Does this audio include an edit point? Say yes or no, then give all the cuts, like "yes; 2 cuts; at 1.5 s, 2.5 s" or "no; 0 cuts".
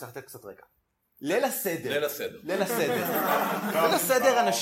no; 0 cuts